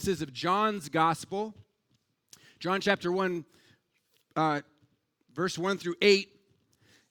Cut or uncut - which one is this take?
uncut